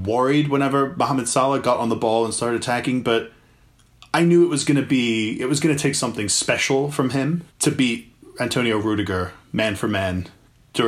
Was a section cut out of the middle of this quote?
yes; 1 cut; at 7.5 s

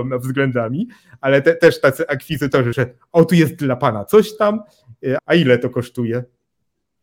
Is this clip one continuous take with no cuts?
no; 2 cuts; at 2.7 s, 5.2 s

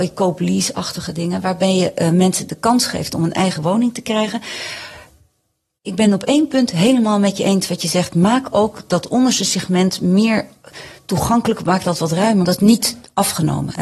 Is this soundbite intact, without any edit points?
no; 1 cut; at 12.4 s

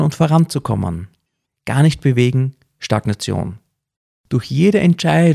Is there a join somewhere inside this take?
yes; 1 cut; at 1.4 s

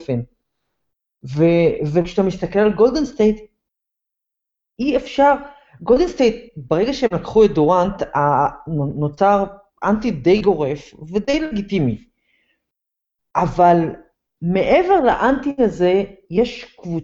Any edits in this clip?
no; 0 cuts

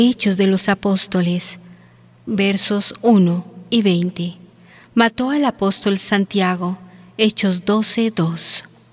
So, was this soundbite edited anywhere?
yes; 1 cut; at 2.3 s

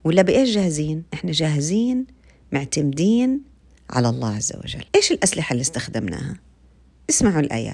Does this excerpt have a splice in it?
yes; 2 cuts; at 1.1 s, 4.9 s

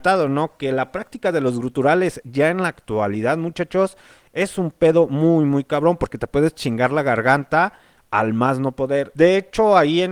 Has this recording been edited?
yes; 1 cut; at 9.1 s

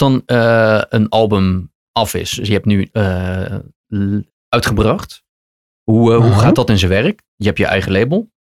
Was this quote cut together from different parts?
yes; 2 cuts; at 4.3 s, 7.2 s

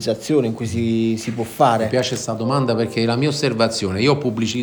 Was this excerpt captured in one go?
yes; 0 cuts

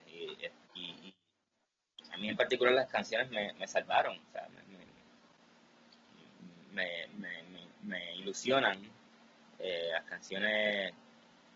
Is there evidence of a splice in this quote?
no; 0 cuts

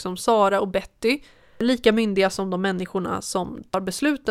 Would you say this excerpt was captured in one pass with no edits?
yes; 0 cuts

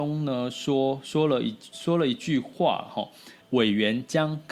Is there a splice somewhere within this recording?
yes; 1 cut; at 3.4 s

